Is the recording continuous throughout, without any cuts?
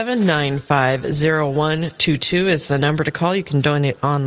yes; 0 cuts

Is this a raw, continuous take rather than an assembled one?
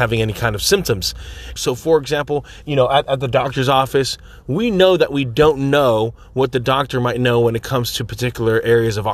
no; 2 cuts; at 1.6 s, 2.6 s

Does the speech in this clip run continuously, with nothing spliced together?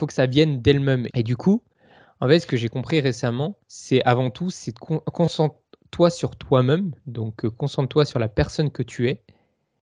no; 2 cuts; at 1.1 s, 3.6 s

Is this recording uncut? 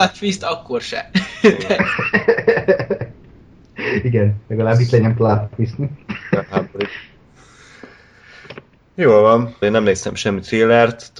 no; 1 cut; at 9.6 s

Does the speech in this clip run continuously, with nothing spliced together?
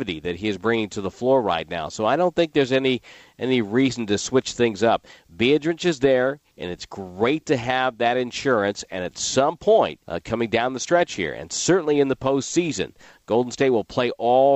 no; 1 cut; at 10.0 s

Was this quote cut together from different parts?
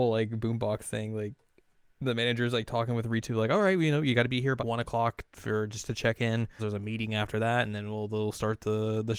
yes; 2 cuts; at 4.6 s, 6.6 s

